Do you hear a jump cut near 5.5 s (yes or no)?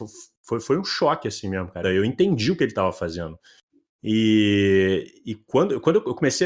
no